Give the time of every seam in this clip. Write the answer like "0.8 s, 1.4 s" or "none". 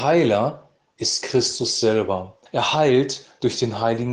2.5 s

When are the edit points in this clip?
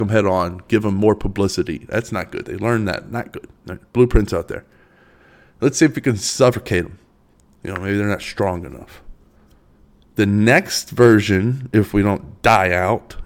none

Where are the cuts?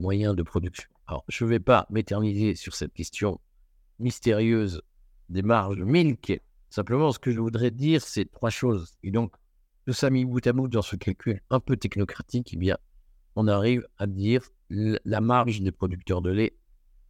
9.0 s

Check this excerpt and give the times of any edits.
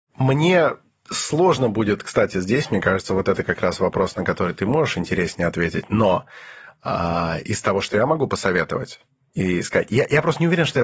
none

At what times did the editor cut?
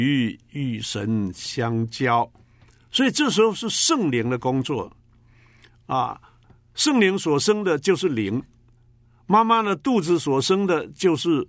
none

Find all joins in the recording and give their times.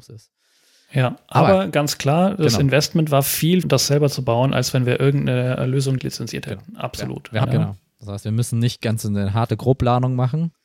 3.6 s, 6.0 s, 7.4 s

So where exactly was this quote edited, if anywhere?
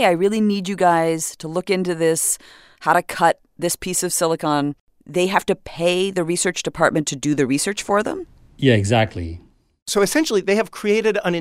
none

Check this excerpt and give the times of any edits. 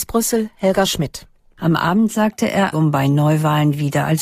2.7 s

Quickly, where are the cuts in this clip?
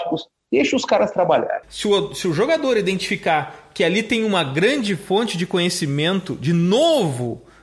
1.6 s

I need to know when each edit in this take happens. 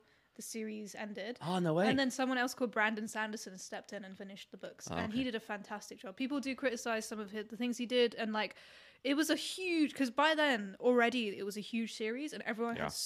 none

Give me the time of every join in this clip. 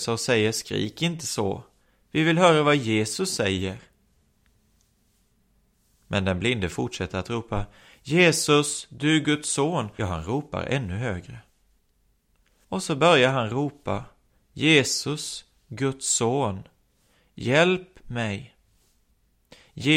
10.0 s, 12.6 s

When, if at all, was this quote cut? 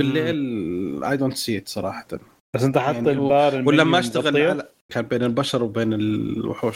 4.9 s

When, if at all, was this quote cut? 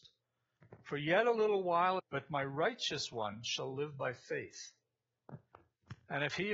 2.0 s

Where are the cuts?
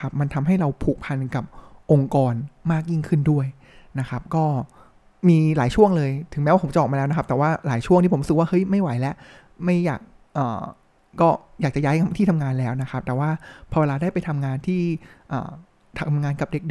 none

